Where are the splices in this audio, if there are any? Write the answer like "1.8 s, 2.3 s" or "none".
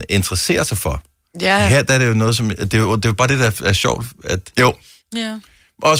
4.5 s